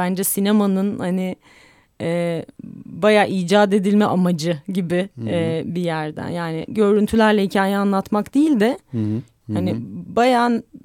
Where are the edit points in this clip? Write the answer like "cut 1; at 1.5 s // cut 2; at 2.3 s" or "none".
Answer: cut 1; at 9.4 s